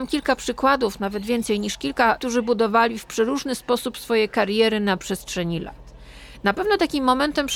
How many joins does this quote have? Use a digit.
1